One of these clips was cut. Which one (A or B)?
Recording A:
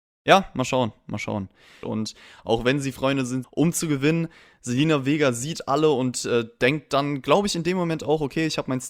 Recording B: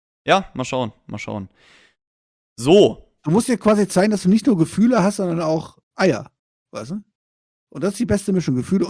A